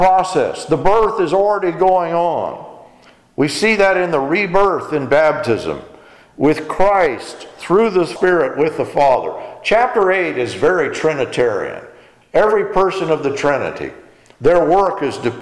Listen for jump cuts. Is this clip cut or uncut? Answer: uncut